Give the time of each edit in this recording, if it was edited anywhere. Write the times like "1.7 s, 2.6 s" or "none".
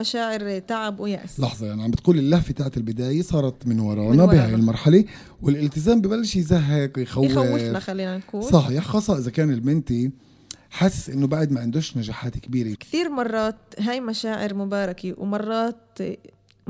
12.7 s